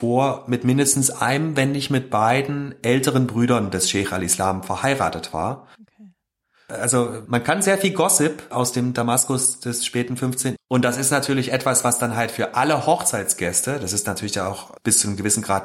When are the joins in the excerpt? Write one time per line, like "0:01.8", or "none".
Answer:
0:05.8
0:10.6